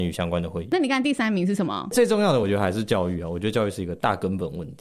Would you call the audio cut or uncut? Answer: uncut